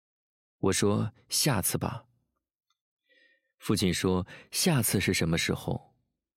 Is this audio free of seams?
yes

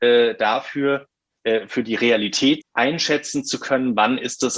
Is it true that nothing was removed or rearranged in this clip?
no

